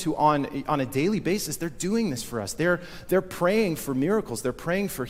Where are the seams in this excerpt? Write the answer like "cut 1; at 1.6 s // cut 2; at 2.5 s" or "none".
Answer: none